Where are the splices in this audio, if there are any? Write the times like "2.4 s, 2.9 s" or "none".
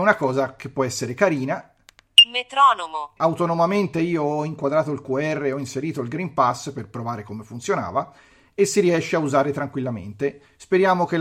3.2 s